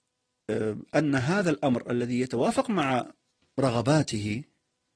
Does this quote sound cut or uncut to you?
uncut